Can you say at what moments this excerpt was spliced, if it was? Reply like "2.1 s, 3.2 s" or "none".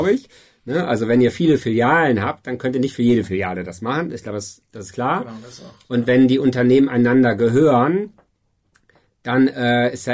none